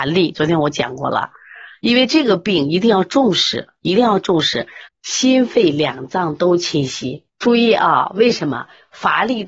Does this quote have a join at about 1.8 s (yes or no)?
no